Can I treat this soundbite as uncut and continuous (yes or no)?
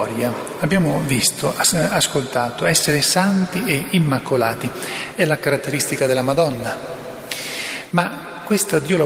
yes